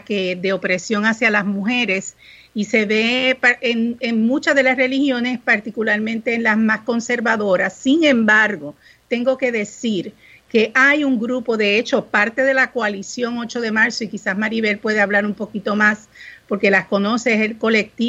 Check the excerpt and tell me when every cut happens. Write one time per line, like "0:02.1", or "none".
none